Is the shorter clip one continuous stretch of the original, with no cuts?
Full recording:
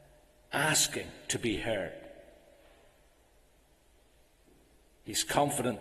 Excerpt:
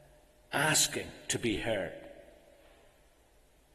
yes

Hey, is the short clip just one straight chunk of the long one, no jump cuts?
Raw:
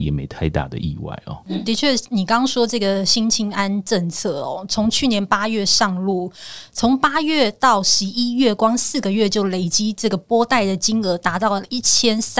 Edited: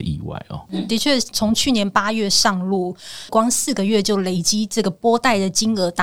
no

